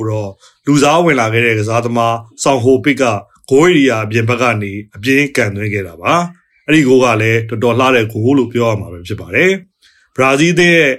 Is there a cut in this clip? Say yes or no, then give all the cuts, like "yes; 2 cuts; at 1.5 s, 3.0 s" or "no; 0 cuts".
no; 0 cuts